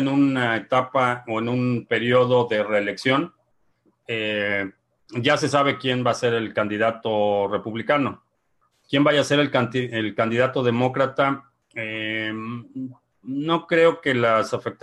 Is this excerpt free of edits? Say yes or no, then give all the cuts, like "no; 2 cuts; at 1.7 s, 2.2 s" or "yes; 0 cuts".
no; 1 cut; at 8.7 s